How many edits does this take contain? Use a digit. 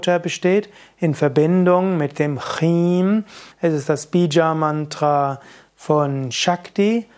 1